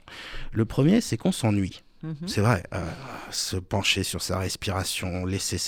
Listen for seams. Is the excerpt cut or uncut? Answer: uncut